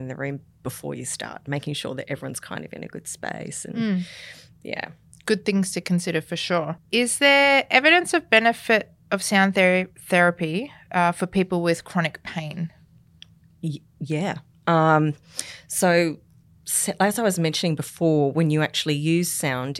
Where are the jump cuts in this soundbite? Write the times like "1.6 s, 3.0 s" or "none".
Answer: 6.8 s